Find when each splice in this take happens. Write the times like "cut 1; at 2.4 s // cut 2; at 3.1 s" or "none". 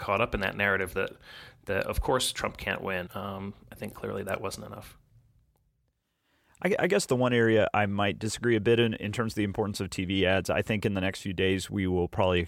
cut 1; at 3.1 s